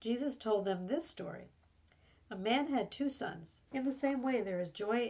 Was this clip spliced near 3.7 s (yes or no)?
yes